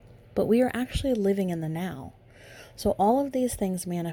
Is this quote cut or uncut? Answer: uncut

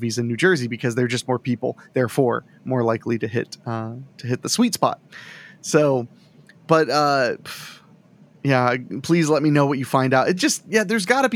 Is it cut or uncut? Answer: uncut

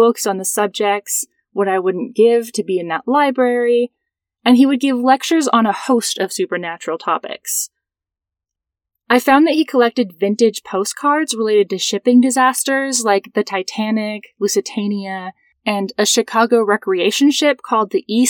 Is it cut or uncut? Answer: uncut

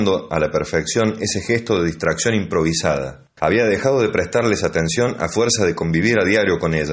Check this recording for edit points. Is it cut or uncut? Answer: cut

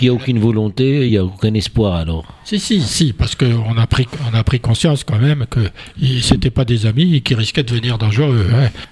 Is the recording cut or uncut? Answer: uncut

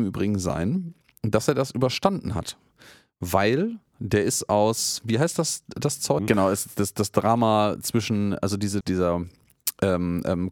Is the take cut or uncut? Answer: cut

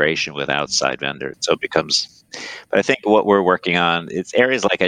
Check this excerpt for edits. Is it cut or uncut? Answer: cut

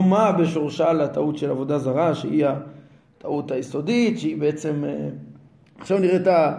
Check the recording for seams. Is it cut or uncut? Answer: uncut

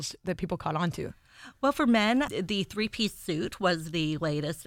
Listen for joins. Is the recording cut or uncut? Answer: cut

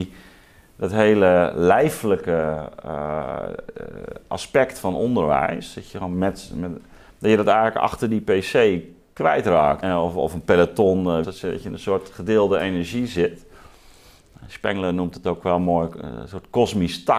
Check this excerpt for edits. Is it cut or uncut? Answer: cut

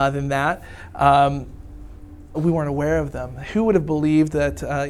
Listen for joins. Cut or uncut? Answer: cut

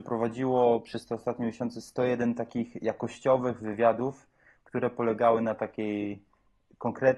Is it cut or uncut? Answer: uncut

